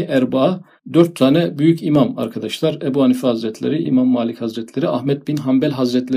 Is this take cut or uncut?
cut